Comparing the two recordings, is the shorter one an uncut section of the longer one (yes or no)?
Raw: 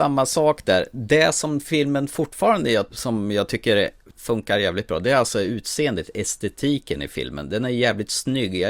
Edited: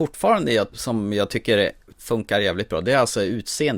yes